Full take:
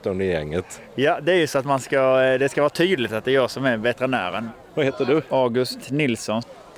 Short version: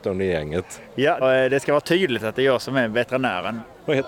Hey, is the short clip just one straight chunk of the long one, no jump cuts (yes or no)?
no